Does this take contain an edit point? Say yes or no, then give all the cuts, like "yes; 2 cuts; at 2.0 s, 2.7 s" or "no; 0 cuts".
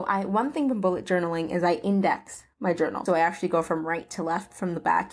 yes; 1 cut; at 3.1 s